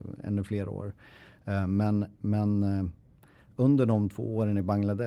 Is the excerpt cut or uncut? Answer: uncut